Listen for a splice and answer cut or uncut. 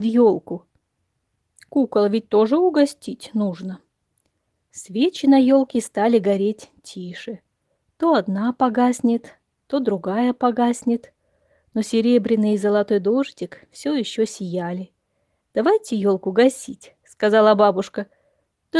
uncut